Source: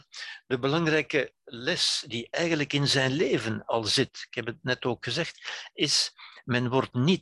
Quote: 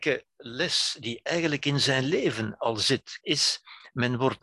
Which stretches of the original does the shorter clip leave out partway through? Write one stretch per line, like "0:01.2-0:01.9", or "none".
0:04.3-0:05.7

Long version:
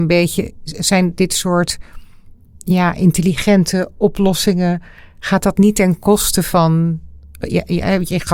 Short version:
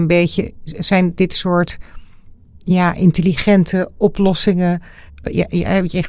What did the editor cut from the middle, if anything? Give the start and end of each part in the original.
0:05.1-0:07.2

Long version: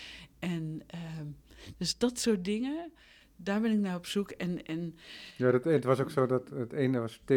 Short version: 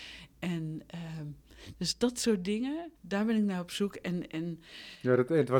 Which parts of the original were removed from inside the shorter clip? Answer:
0:03.0-0:03.3

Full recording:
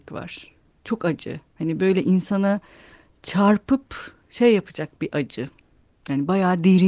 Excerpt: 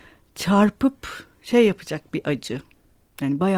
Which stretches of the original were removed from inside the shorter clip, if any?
none

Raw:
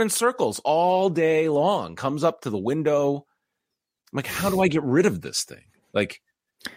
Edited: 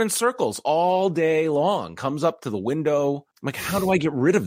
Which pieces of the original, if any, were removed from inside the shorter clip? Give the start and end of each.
0:03.3-0:04.0

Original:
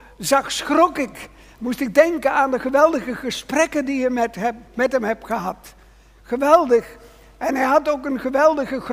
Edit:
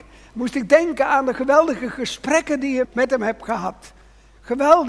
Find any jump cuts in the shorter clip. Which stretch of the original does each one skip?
0:04.1-0:04.7

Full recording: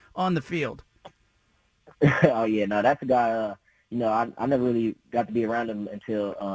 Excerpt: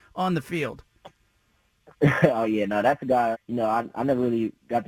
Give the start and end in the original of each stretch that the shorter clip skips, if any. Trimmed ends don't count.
0:03.3-0:03.8

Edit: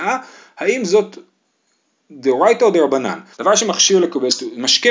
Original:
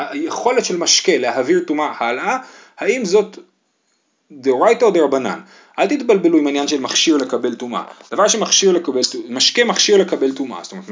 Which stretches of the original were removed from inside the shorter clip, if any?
0:05.5-0:08.0

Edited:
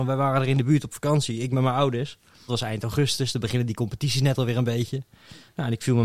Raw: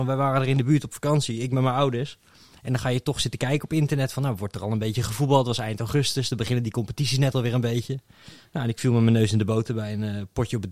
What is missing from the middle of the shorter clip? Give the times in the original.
0:02.5-0:05.4

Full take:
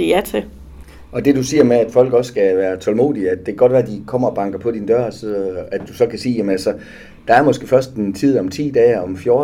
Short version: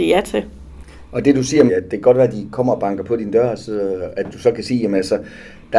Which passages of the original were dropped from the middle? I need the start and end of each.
0:01.7-0:03.2

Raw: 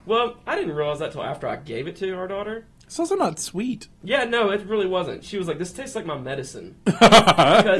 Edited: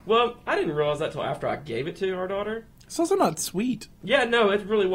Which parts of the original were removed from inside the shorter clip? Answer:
none

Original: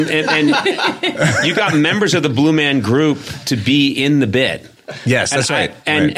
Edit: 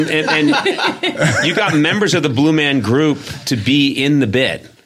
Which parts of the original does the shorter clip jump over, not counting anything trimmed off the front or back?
none

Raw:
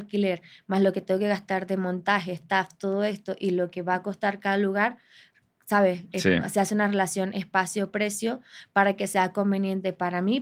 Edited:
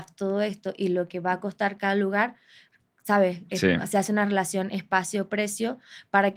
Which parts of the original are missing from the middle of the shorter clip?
none

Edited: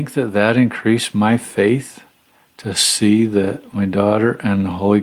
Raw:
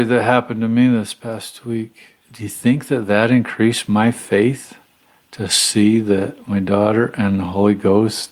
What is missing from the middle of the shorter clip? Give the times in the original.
none

